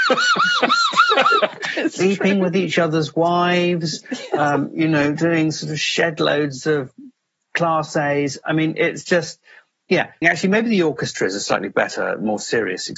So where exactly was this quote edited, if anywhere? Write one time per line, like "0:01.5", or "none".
0:10.2